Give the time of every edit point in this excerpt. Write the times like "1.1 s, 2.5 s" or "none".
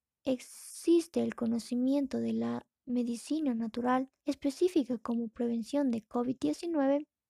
4.2 s